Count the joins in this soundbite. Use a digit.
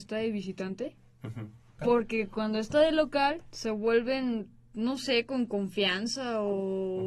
1